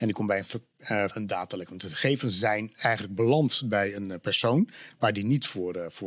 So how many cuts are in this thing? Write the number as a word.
one